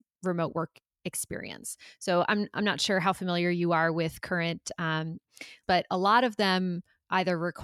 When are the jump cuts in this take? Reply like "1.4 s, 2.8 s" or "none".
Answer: 5.6 s